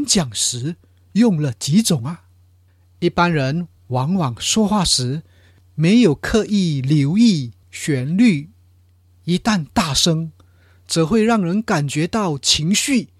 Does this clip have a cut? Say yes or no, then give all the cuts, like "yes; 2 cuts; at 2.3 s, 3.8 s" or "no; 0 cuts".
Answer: no; 0 cuts